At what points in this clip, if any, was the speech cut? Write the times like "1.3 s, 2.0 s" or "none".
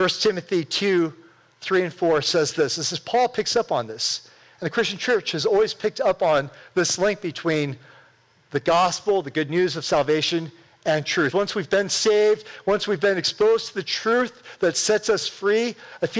11.3 s